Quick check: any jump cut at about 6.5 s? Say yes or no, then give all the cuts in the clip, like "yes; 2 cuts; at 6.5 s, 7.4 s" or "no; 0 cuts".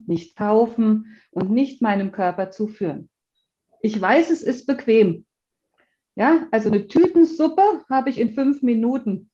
no; 0 cuts